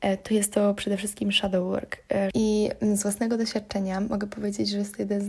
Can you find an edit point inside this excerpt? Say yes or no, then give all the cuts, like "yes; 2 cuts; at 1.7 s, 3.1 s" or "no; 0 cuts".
yes; 1 cut; at 2.3 s